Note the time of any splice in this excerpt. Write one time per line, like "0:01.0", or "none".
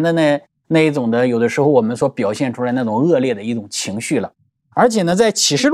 none